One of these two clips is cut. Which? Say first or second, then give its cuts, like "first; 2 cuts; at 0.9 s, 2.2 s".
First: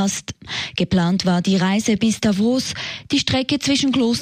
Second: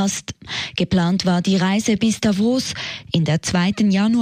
second; 1 cut; at 3.1 s